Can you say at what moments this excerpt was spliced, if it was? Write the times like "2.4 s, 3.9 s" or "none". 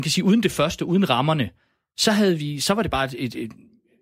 none